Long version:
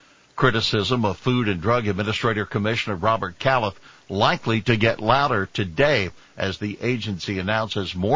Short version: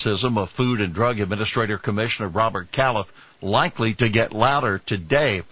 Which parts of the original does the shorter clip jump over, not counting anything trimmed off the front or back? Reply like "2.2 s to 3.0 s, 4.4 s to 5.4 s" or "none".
none